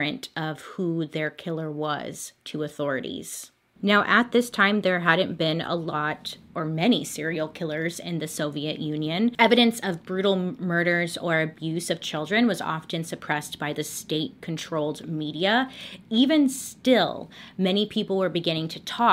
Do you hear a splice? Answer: no; 0 cuts

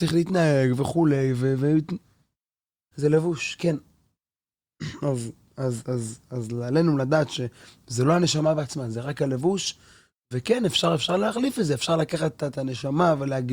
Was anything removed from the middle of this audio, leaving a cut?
yes; 1 cut; at 2.9 s

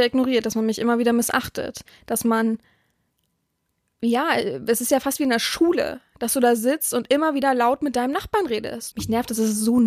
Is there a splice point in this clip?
yes; 1 cut; at 8.9 s

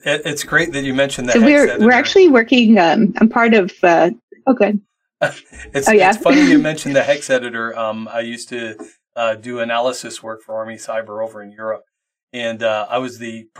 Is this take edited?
no; 0 cuts

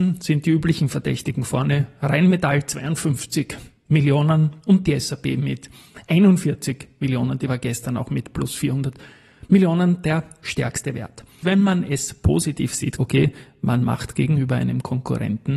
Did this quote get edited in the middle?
yes; 2 cuts; at 11.4 s, 13.0 s

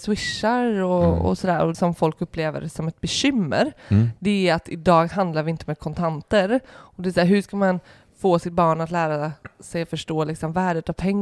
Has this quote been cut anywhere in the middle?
yes; 1 cut; at 1.7 s

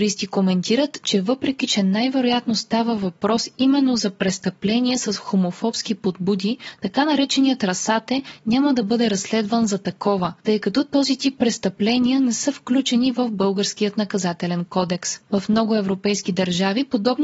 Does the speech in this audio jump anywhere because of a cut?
no; 0 cuts

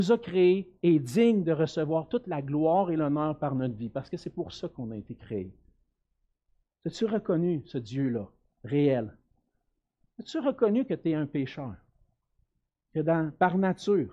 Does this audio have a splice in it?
no; 0 cuts

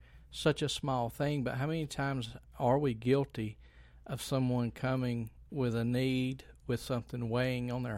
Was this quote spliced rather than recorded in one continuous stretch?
yes; 1 cut; at 5.5 s

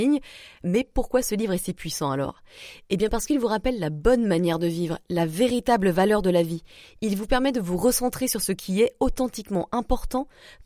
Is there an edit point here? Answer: no; 0 cuts

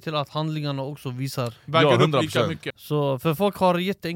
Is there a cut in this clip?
yes; 1 cut; at 2.7 s

